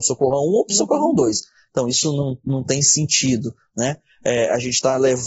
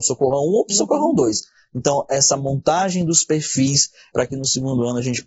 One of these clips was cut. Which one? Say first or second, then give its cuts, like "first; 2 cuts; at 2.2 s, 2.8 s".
second; 2 cuts; at 1.7 s, 4.1 s